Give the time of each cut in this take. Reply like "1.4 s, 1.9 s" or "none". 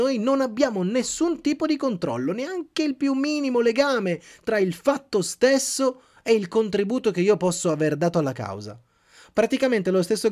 none